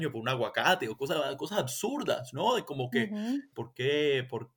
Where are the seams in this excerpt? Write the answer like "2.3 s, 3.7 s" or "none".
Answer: 3.5 s